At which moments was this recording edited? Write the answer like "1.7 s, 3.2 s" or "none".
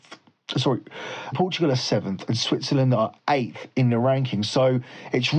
1.3 s

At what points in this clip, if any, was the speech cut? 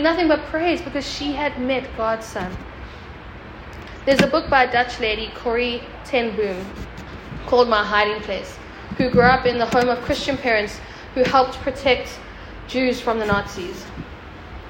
none

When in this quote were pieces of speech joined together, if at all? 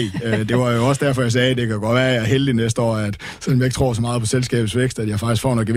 none

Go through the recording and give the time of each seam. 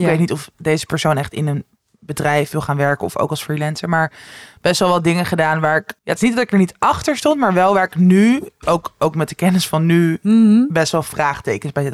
6.0 s

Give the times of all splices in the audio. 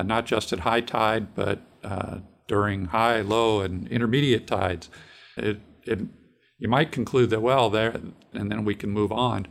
5.4 s, 8.3 s

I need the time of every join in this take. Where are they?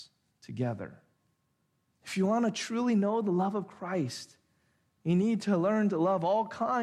1.9 s

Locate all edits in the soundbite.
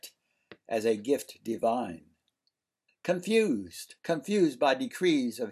2.9 s, 4.0 s

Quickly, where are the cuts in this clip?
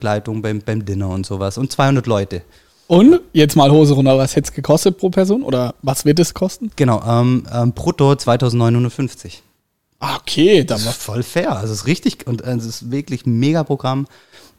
none

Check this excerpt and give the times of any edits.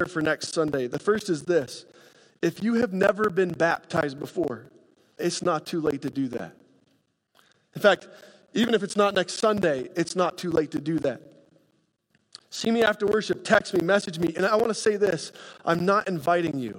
5.2 s, 14.3 s

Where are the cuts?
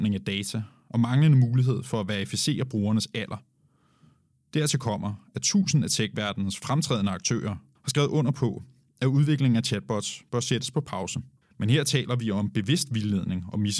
7.8 s, 11.4 s

